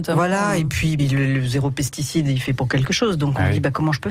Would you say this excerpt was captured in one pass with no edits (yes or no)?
no